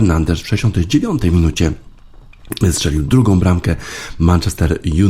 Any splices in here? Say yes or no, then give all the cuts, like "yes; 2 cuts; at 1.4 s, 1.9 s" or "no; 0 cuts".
no; 0 cuts